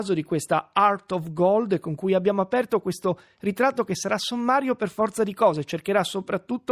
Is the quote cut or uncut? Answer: uncut